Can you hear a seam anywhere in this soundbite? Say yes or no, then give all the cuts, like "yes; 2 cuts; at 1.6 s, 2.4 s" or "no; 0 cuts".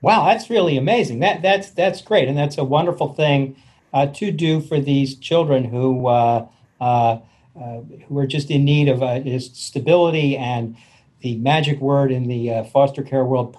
no; 0 cuts